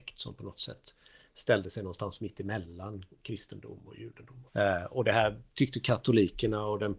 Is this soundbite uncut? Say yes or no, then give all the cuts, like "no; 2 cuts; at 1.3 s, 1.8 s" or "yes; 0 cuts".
no; 1 cut; at 4.5 s